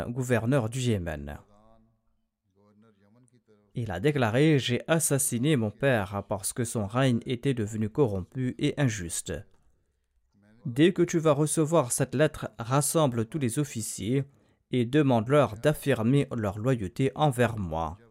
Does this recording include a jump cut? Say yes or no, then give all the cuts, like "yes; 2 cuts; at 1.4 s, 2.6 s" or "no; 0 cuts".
yes; 1 cut; at 10.6 s